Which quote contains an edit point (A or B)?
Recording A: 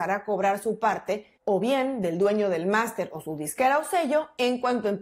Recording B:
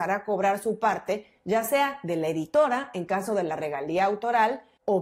A